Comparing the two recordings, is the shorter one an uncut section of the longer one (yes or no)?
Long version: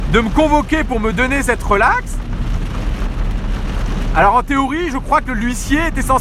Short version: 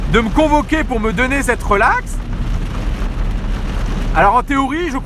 yes